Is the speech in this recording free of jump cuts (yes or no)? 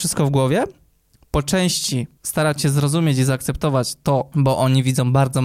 no